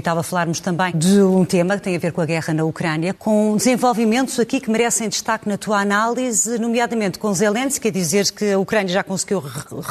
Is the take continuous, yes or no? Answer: no